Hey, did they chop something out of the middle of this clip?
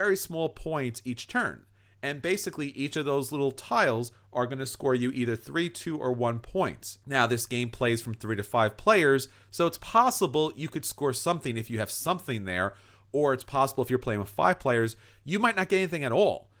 no; 0 cuts

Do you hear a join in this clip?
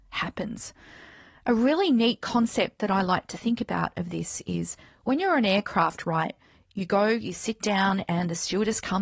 no; 0 cuts

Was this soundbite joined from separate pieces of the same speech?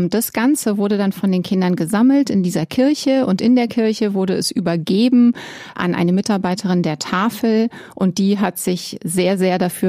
no; 0 cuts

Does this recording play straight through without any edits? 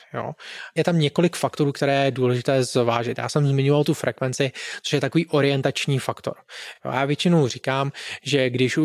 yes; 0 cuts

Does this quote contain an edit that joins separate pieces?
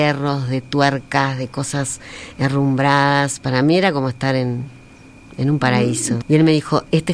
yes; 1 cut; at 6.2 s

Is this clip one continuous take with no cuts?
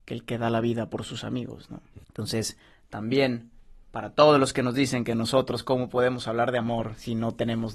no; 1 cut; at 2.0 s

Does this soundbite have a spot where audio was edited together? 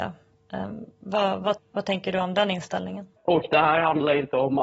yes; 2 cuts; at 1.6 s, 3.2 s

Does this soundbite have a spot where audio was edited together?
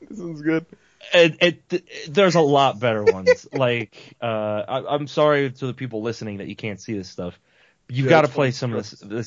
no; 0 cuts

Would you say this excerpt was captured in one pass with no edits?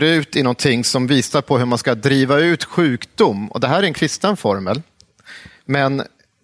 yes; 0 cuts

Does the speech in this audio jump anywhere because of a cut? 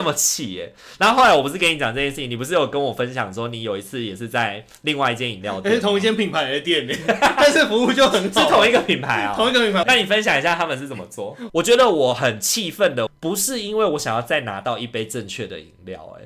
yes; 3 cuts; at 9.8 s, 11.5 s, 13.1 s

